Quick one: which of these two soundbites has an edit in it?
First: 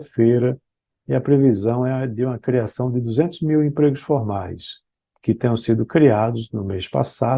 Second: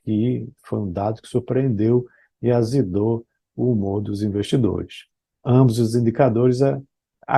first; 1 cut; at 5.2 s

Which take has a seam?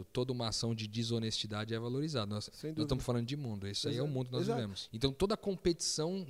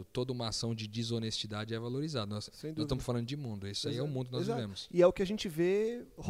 first; 1 cut; at 4.9 s

